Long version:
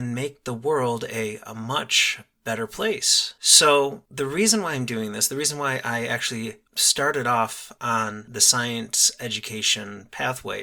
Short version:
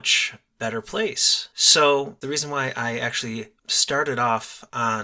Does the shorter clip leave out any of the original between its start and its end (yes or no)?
yes